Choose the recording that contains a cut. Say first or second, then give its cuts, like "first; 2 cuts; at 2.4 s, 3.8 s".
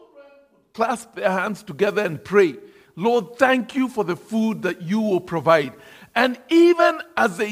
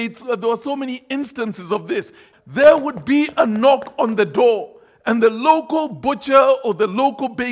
second; 1 cut; at 2.3 s